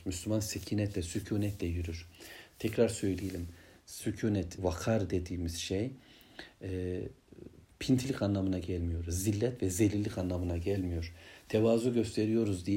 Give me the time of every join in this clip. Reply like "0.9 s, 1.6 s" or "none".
4.6 s